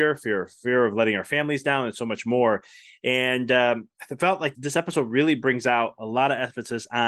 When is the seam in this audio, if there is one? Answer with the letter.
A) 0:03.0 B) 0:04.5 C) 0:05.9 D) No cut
B